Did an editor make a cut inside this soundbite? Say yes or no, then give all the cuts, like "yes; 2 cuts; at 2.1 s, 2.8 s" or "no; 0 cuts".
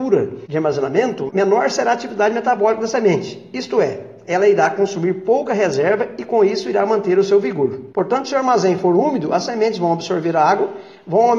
yes; 2 cuts; at 1.3 s, 7.9 s